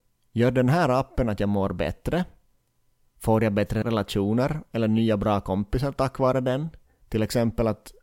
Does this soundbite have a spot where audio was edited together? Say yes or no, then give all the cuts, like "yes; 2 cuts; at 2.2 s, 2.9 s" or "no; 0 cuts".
yes; 1 cut; at 7.0 s